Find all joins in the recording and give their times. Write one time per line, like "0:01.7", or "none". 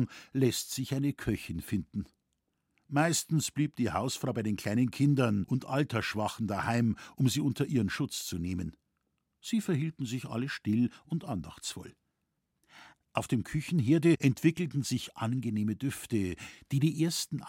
none